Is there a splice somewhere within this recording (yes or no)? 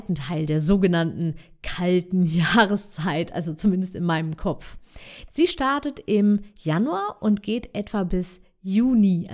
yes